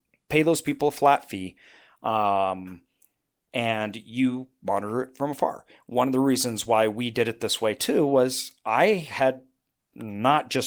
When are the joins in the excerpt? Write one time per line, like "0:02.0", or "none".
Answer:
none